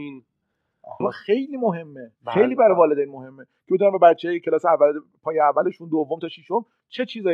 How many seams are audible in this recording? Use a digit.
2